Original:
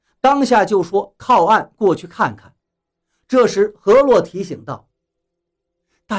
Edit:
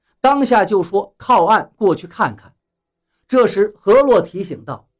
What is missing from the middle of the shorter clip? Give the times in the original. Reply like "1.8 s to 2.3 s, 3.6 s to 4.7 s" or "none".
none